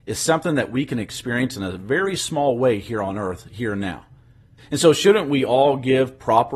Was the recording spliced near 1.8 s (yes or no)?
no